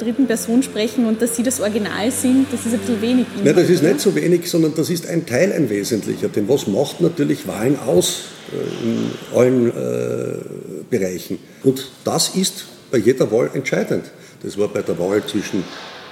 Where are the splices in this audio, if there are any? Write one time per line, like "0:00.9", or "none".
0:11.6

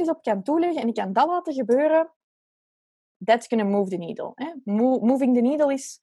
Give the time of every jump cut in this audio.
none

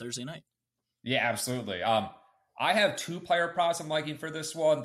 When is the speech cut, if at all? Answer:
none

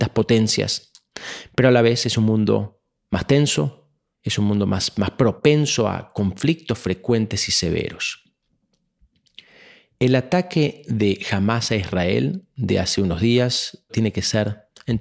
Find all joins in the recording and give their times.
0:13.9

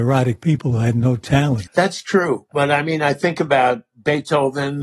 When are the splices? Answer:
0:01.7

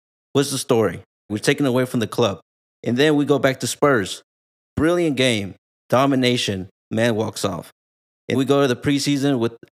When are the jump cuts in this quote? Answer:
0:01.3
0:06.8
0:08.3

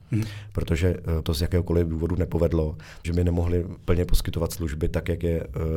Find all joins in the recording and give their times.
0:01.2
0:03.0

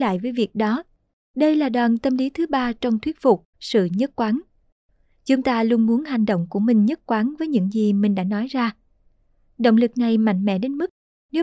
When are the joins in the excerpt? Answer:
0:01.2
0:03.5

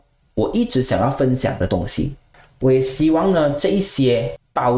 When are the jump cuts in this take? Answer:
none

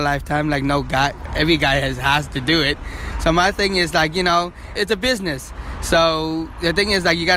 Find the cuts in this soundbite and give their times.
0:04.8

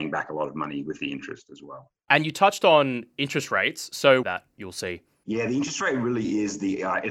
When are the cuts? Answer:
0:04.2

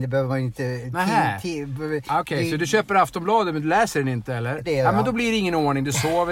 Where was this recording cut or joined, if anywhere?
0:04.6

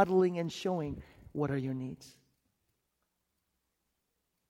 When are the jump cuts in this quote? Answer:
none

